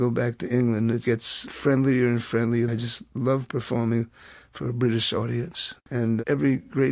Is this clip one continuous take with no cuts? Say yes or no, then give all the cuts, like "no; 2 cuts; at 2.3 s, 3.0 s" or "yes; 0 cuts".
no; 2 cuts; at 2.7 s, 5.9 s